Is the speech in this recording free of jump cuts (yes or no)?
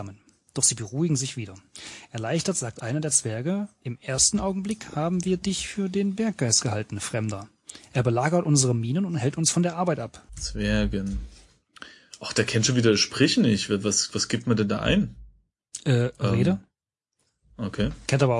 no